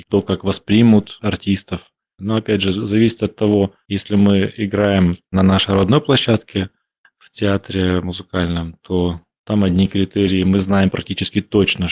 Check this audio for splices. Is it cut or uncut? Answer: cut